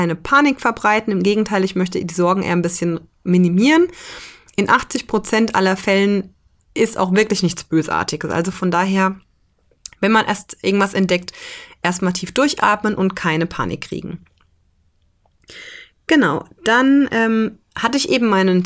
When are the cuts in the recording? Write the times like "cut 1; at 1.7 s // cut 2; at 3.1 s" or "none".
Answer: none